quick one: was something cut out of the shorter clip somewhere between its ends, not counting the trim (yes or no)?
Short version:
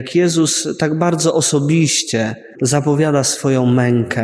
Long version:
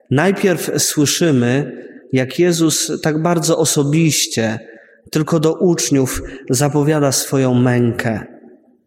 yes